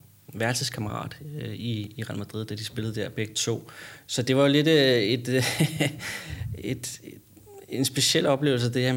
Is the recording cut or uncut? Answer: uncut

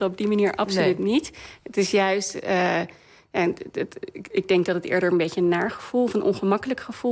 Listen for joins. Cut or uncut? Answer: uncut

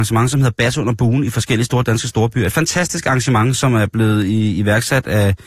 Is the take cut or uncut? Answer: uncut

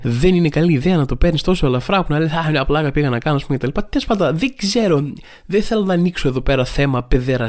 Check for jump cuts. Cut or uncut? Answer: uncut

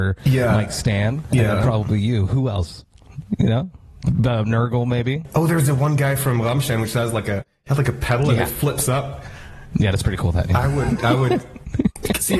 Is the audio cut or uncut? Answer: uncut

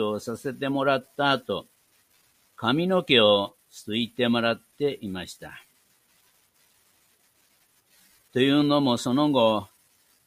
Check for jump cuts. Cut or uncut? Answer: cut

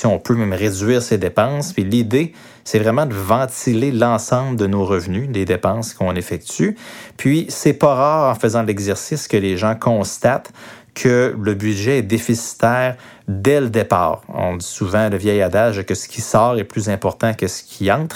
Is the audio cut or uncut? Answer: uncut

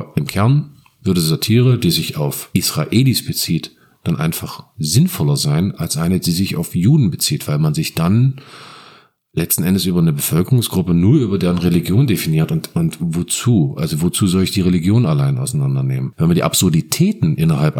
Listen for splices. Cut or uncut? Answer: uncut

